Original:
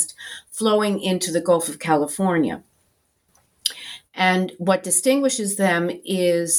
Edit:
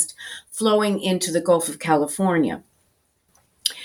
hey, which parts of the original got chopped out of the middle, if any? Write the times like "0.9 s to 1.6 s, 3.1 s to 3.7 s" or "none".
none